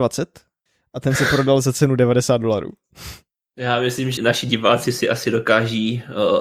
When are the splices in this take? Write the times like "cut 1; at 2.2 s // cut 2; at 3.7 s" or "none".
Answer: cut 1; at 4.2 s